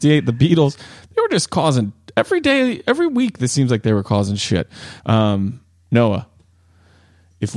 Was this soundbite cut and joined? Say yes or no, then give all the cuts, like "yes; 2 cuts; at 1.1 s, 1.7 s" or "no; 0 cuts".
yes; 1 cut; at 5.0 s